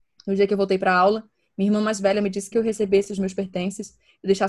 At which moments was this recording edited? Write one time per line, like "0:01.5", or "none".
0:02.5